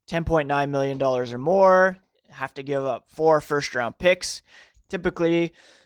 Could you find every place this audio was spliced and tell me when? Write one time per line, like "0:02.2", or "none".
0:04.7